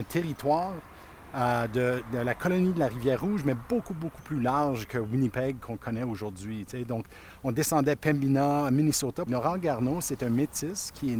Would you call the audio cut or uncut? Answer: cut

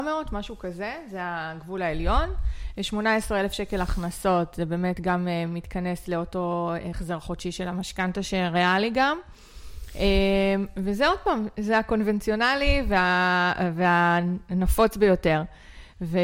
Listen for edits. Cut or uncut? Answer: uncut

